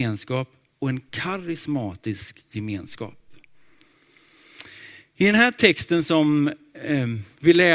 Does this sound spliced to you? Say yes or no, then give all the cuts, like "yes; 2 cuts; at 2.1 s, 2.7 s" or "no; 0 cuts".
no; 0 cuts